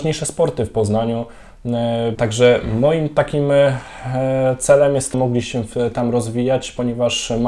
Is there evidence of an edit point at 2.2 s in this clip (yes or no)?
yes